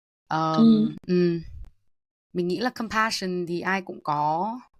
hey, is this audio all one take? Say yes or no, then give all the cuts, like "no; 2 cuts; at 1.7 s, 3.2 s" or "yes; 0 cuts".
yes; 0 cuts